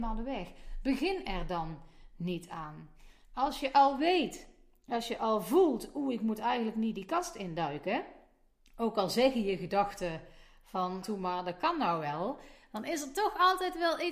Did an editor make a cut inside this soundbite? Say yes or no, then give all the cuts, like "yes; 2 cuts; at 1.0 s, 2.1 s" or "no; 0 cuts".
yes; 1 cut; at 11.0 s